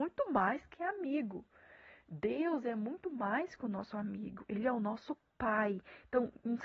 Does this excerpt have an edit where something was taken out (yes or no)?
no